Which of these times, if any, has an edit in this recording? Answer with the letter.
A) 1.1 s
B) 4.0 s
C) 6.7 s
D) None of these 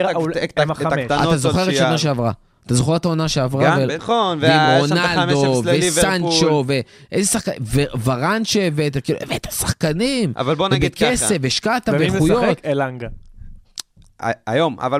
B